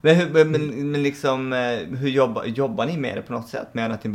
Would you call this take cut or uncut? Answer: uncut